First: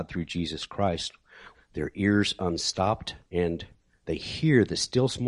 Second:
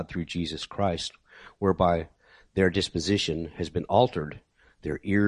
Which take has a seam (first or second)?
first